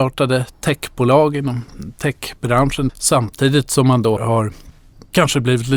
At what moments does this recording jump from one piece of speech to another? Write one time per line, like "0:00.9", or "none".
0:02.9
0:04.2

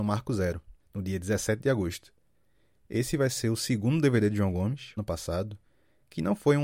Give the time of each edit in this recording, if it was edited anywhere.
0:05.0

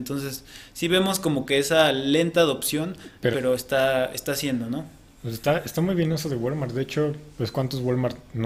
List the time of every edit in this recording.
0:03.3

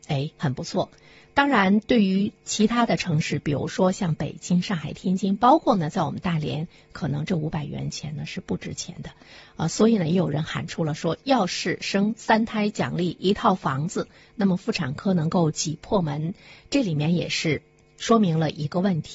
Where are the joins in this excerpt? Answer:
none

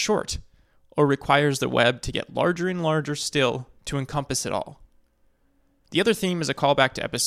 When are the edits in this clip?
0:05.9

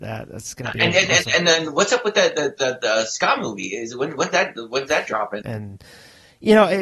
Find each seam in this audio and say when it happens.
0:05.4

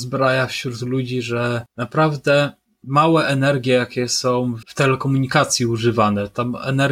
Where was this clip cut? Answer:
0:04.6

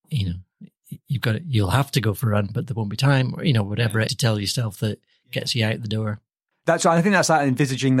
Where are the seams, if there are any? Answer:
0:04.1

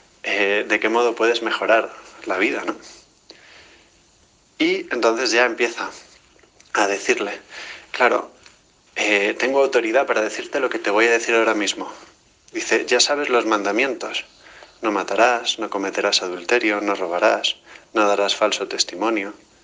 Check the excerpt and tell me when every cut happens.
0:08.9

